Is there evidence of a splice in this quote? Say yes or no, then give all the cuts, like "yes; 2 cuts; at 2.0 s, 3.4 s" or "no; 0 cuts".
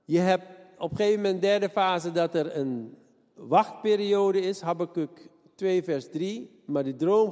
no; 0 cuts